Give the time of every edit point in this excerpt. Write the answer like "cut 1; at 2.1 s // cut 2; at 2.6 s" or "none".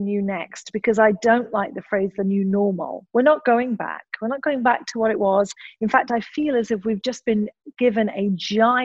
none